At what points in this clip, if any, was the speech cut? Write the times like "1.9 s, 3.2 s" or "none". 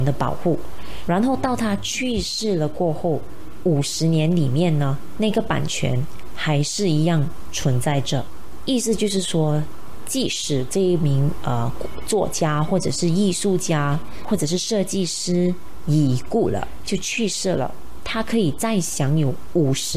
1.1 s